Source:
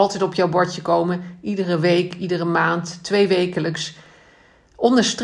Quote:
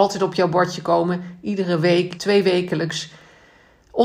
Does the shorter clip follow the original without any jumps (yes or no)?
no